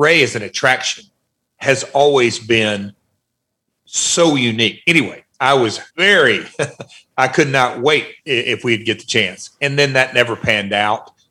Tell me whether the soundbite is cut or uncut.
cut